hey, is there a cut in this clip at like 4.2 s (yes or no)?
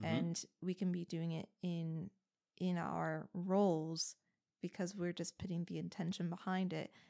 no